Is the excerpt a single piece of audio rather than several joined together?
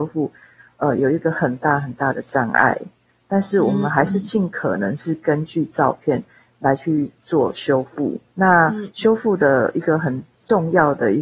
yes; 0 cuts

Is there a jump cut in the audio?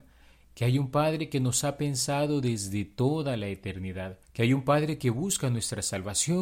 yes; 1 cut; at 4.2 s

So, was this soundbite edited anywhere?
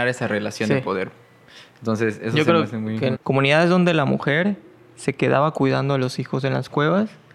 yes; 1 cut; at 3.1 s

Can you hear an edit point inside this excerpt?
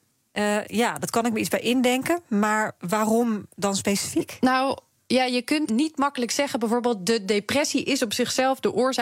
yes; 1 cut; at 5.7 s

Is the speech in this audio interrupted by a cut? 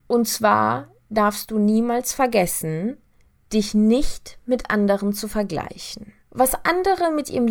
yes; 1 cut; at 6.2 s

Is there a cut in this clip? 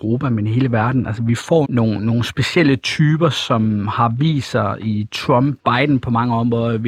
yes; 2 cuts; at 1.6 s, 5.6 s

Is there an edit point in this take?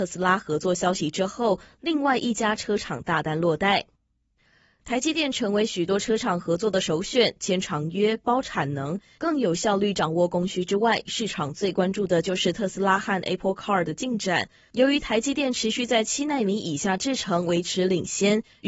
no; 0 cuts

